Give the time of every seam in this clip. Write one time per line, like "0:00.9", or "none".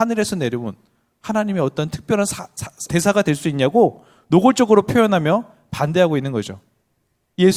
0:02.9